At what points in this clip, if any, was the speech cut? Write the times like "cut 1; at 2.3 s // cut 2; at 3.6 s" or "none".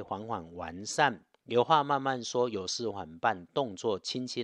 cut 1; at 1.3 s // cut 2; at 2.9 s